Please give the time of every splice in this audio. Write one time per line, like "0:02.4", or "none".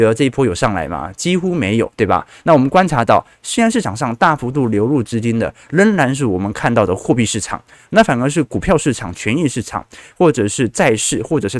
none